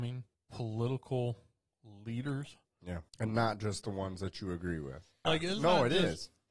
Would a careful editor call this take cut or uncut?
cut